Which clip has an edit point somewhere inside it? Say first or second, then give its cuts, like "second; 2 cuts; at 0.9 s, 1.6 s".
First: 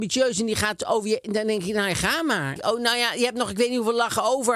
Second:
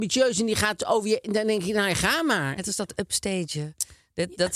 first; 1 cut; at 2.6 s